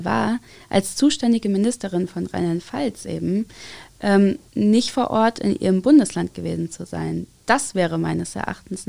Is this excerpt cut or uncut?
cut